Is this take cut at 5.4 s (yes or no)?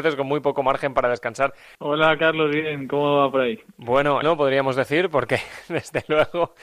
no